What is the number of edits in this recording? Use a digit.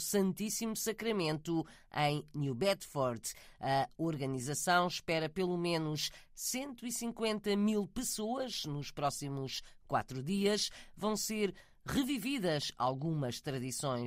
0